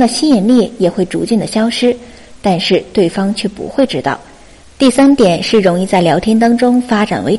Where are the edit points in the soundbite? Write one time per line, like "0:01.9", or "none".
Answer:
0:02.4

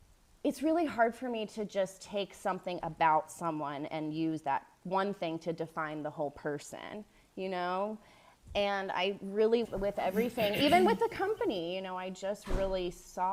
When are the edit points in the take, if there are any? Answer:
0:09.6

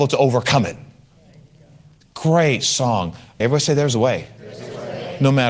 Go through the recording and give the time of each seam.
0:02.0
0:03.4

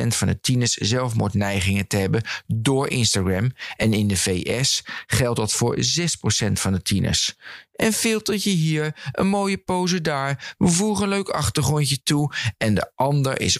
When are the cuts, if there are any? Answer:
none

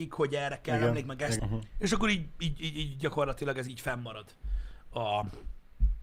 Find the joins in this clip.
0:01.4

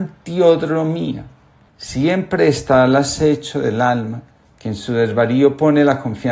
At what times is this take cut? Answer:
0:01.7

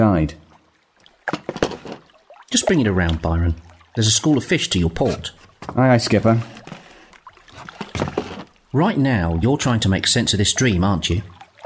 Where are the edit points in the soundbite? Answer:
none

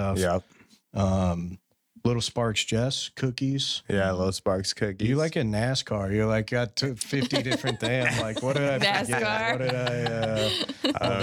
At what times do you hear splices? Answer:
none

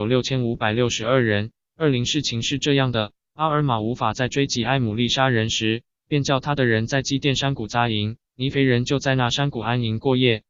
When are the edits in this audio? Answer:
0:08.2

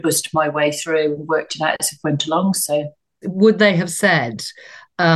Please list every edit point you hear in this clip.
0:03.2

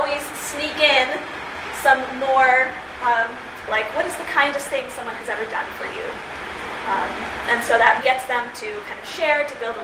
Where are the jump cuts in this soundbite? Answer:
0:03.7
0:08.0

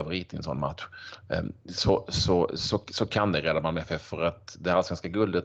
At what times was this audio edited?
none

